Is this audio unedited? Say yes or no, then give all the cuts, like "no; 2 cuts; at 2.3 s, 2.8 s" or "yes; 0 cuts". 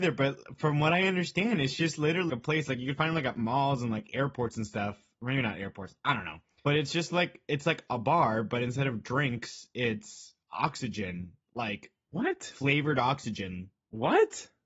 no; 1 cut; at 2.3 s